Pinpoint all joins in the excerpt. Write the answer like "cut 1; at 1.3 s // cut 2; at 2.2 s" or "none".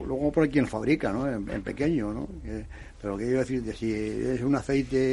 none